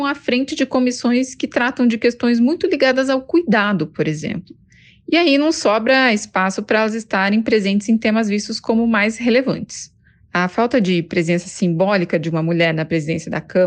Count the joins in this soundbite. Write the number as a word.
zero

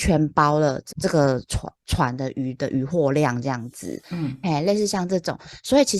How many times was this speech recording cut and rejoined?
one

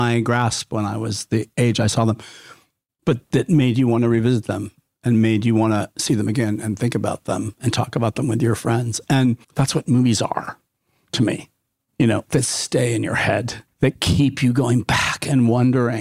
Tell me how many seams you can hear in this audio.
three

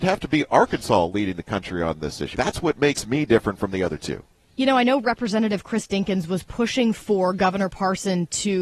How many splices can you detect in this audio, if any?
one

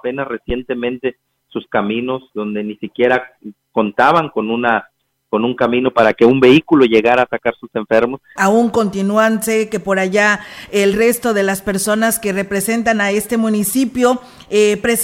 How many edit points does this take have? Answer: one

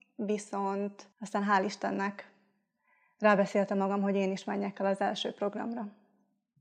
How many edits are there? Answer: one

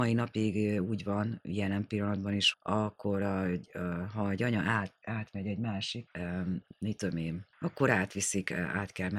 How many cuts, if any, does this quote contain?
three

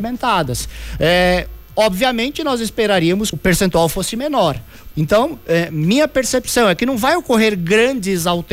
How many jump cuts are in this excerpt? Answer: two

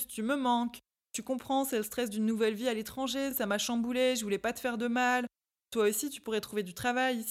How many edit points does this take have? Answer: zero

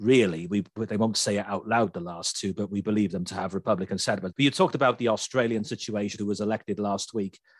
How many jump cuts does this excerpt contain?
two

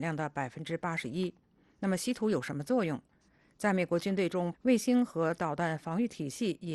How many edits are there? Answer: one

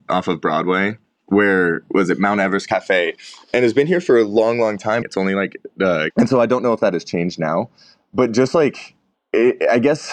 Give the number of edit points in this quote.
two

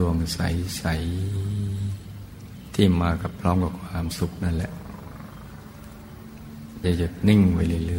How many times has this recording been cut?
one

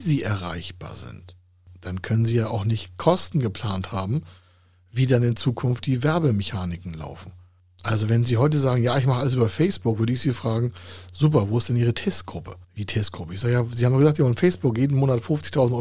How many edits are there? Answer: one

